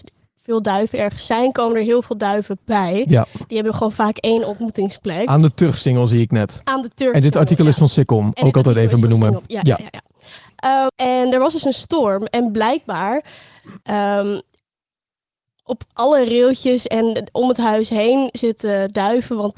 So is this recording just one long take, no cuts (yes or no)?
no